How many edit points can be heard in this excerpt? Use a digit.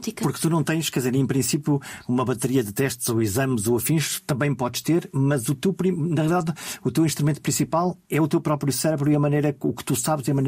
0